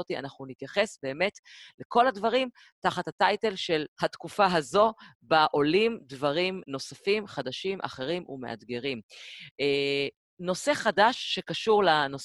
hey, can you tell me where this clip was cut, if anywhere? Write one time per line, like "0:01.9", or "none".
0:03.9
0:06.6